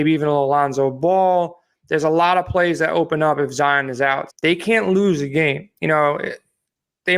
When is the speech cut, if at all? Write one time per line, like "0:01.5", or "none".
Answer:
0:04.3